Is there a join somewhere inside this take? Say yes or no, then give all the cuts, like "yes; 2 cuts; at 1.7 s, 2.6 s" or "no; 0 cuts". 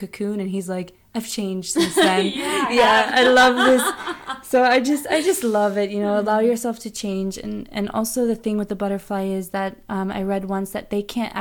no; 0 cuts